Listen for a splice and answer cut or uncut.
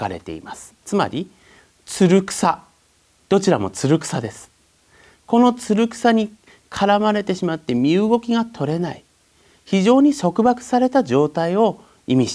uncut